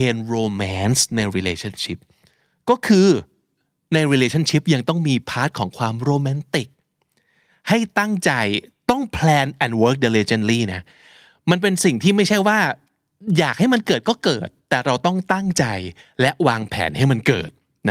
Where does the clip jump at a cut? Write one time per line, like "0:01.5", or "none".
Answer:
none

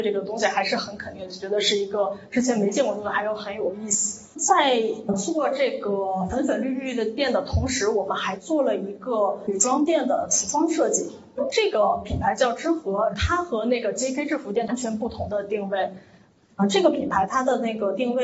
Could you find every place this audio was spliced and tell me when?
none

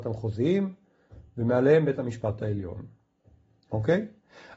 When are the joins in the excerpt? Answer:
none

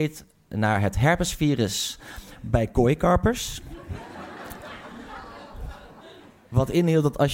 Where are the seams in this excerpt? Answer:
none

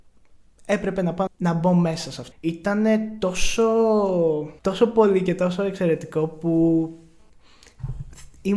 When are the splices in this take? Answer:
0:01.3
0:02.3
0:04.6

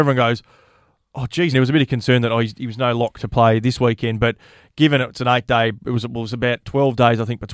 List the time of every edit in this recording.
0:01.5

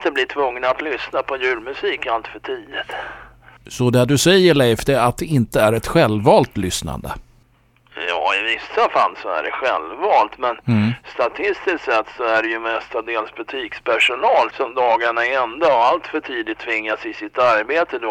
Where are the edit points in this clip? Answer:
0:14.5

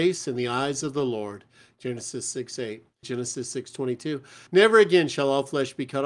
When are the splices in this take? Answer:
0:03.0
0:04.5

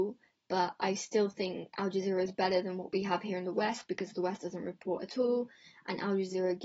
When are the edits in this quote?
none

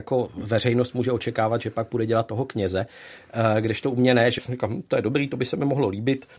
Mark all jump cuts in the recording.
0:04.4

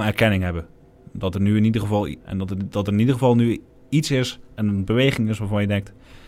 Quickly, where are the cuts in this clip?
0:02.2

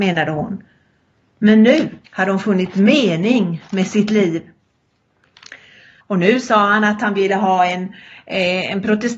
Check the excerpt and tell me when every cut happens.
0:02.1
0:06.0

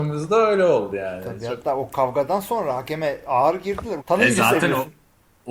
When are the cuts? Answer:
0:04.0

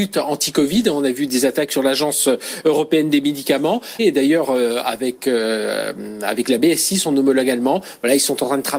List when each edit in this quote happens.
0:04.0

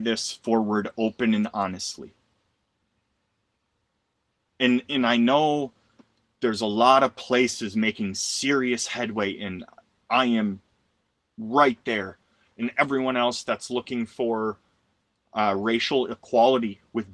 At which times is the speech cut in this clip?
none

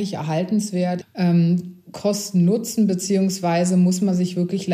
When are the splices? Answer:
0:01.0

